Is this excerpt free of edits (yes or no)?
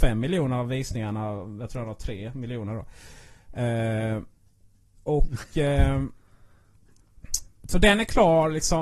yes